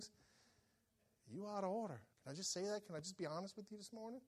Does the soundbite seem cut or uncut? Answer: cut